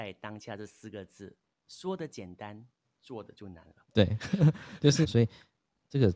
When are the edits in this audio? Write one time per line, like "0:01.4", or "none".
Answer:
0:03.8
0:05.0

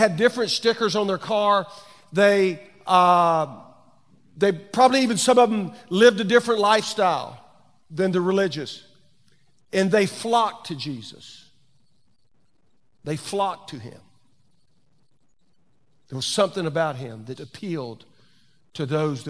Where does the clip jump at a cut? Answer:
0:17.4

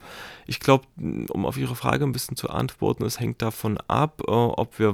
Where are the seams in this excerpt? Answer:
none

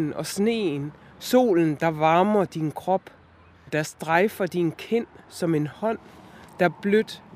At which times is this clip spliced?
0:03.7

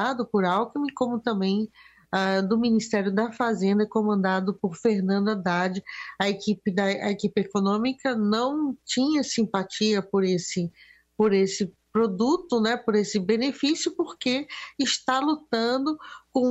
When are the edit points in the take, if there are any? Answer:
none

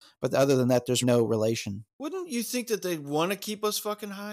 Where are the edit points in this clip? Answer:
0:01.0

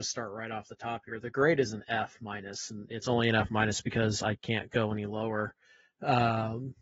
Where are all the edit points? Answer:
none

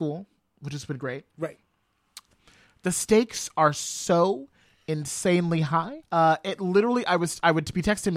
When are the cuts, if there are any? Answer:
0:06.0

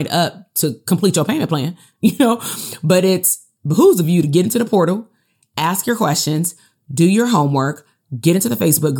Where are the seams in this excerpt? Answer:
none

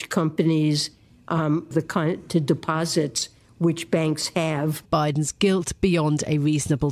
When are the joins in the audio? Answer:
0:01.7
0:04.8

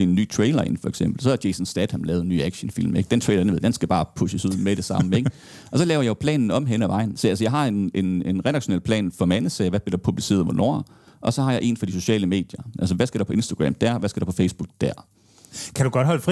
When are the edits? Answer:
none

